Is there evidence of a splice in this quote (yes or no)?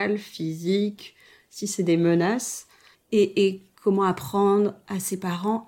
yes